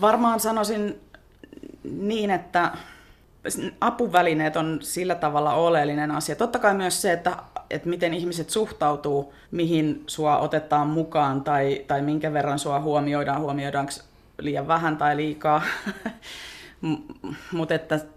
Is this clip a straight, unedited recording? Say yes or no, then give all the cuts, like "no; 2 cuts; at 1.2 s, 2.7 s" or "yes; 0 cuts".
no; 1 cut; at 9.4 s